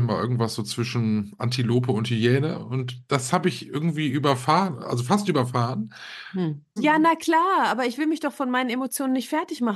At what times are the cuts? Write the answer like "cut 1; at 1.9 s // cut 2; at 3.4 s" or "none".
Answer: cut 1; at 6.8 s